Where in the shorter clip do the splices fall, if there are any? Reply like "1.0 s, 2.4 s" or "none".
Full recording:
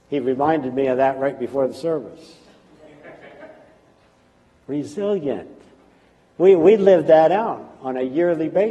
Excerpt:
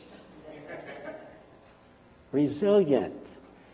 none